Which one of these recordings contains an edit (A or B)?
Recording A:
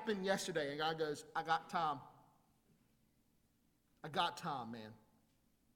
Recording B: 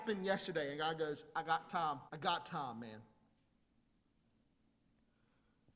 B